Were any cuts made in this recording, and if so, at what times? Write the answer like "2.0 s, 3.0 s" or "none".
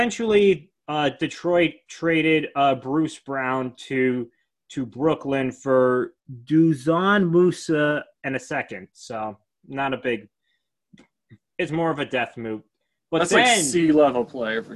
none